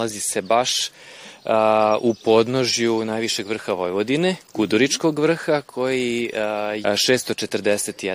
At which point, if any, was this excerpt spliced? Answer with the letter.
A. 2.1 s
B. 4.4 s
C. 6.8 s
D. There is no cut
C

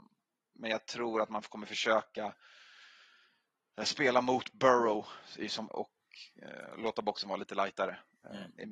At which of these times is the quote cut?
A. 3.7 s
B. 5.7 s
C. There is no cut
B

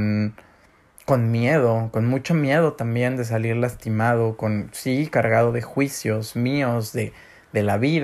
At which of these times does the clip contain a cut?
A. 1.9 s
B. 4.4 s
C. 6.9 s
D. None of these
D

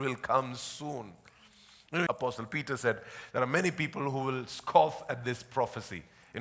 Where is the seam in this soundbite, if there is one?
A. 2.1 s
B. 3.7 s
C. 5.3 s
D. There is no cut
A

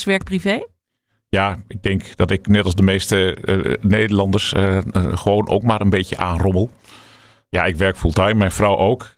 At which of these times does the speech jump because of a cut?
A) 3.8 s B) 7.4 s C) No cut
C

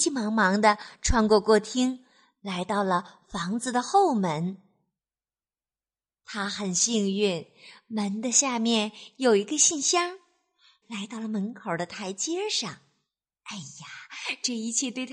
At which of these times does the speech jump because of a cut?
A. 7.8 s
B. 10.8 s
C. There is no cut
B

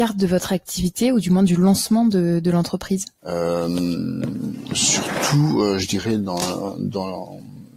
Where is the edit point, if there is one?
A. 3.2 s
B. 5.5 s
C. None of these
A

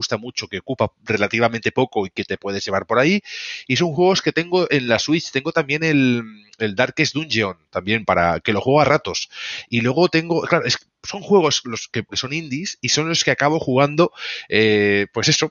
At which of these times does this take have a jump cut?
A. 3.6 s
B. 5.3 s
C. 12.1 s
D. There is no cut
C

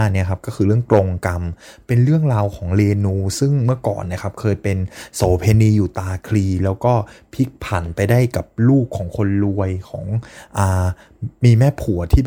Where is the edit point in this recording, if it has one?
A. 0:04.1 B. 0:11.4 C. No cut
B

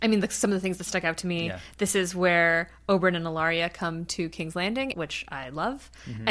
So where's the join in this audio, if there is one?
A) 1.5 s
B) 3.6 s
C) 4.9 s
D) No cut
C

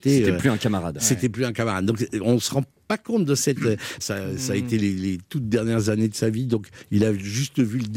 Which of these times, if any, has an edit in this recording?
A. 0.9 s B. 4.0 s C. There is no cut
B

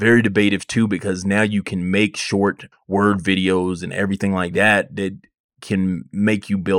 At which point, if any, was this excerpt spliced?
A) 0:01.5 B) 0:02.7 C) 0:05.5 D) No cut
B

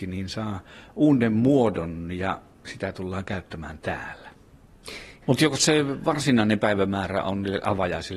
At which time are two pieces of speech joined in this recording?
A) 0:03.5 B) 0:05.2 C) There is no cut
B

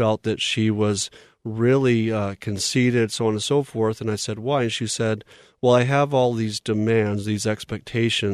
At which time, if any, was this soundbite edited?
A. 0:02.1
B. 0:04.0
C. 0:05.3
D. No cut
D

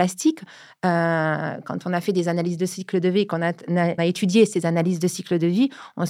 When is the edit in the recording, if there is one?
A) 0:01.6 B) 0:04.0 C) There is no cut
B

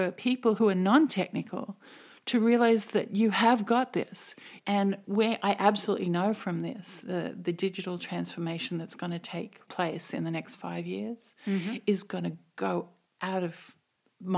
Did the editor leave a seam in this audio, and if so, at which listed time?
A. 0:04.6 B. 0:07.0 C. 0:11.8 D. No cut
A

